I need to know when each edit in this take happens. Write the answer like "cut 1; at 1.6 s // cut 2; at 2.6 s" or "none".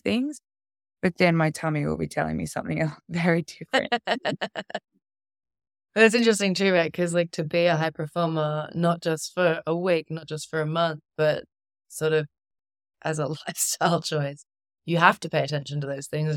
none